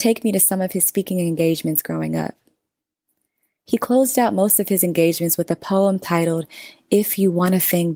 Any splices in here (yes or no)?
no